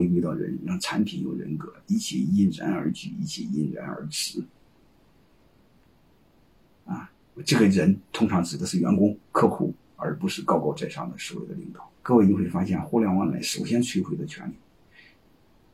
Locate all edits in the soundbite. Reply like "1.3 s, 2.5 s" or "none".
12.0 s